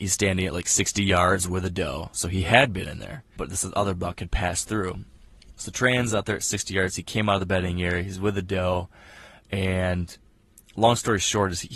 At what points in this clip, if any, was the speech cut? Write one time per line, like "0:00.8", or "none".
0:03.4